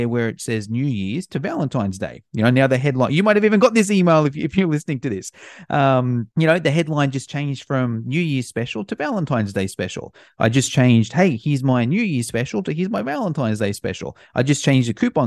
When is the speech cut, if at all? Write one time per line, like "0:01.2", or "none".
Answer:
0:06.3